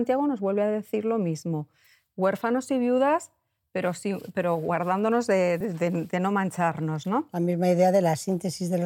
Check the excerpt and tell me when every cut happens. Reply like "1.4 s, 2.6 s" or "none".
none

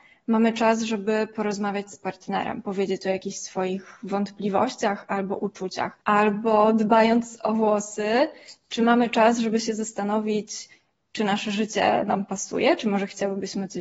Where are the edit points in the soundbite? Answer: 6.0 s

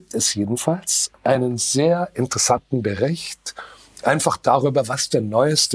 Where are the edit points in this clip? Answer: none

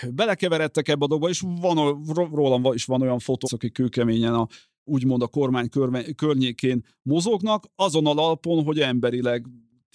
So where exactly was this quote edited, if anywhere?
2.3 s, 3.4 s

